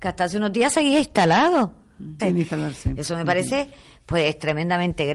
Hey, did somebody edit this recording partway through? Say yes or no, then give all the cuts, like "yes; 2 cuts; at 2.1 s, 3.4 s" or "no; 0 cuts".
yes; 1 cut; at 2.2 s